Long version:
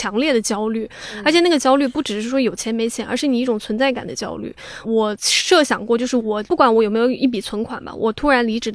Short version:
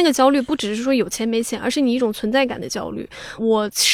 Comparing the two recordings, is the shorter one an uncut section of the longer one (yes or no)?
yes